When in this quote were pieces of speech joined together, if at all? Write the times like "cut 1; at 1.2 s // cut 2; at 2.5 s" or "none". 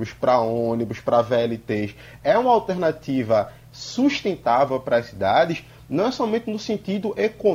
none